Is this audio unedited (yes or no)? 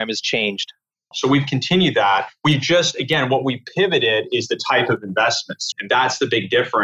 no